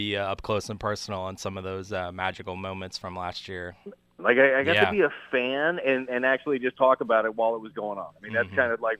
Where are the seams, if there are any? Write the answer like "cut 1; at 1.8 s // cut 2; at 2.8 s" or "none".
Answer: cut 1; at 4.2 s

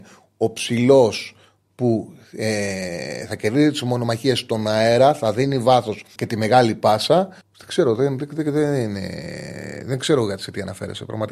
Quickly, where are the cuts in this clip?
cut 1; at 6.2 s // cut 2; at 7.4 s

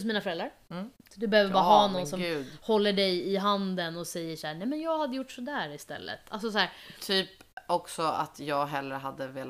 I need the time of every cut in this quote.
cut 1; at 1.1 s

